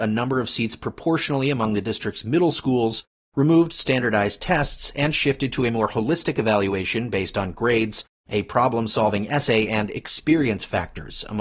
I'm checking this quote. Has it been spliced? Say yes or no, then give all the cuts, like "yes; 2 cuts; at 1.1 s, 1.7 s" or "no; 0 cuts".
no; 0 cuts